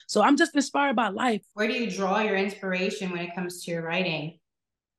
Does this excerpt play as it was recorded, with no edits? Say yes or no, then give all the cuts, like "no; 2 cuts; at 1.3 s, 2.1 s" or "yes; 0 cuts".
no; 1 cut; at 1.4 s